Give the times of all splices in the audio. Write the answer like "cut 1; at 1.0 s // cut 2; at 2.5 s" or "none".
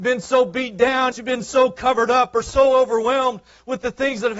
cut 1; at 1.1 s